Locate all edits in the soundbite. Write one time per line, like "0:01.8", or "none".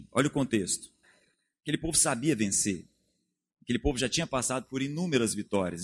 none